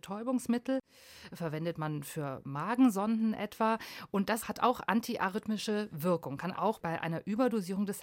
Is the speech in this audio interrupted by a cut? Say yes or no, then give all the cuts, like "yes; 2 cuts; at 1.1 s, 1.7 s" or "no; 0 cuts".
yes; 1 cut; at 6.5 s